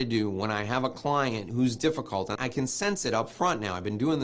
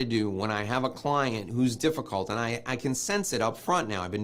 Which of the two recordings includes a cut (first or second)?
first